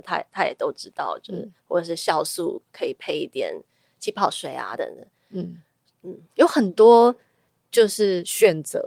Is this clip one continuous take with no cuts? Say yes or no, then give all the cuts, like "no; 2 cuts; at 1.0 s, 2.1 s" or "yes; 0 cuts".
no; 1 cut; at 4.8 s